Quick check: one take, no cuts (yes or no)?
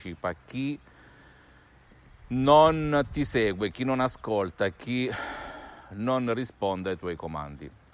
yes